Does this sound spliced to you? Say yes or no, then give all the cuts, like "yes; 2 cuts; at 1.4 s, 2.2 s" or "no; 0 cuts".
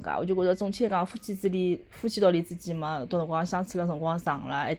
no; 0 cuts